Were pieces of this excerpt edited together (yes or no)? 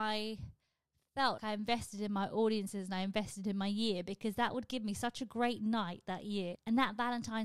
yes